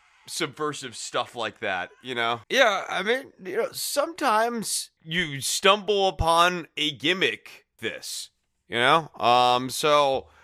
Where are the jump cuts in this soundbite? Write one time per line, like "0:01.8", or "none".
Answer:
0:02.4
0:05.0
0:07.8